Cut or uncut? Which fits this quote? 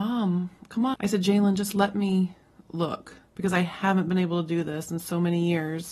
cut